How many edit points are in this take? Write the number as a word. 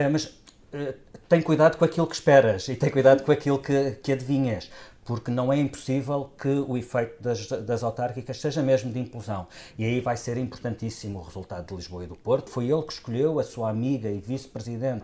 one